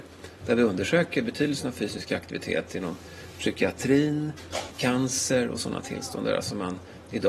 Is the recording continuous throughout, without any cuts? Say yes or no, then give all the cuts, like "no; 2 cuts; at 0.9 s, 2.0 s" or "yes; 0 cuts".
no; 1 cut; at 4.7 s